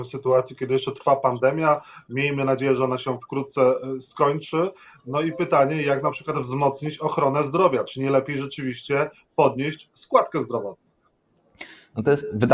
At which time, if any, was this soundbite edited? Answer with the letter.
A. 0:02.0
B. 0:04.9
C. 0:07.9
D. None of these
D